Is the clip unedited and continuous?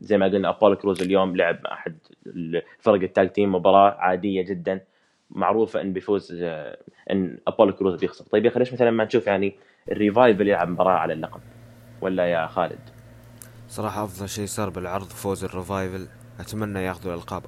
yes; 0 cuts

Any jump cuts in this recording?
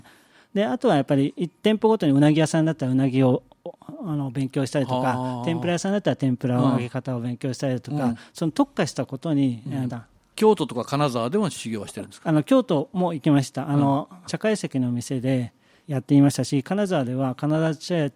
yes; 2 cuts; at 9.9 s, 14.3 s

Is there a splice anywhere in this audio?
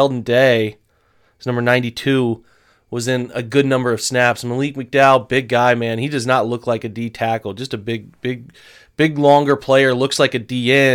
no; 0 cuts

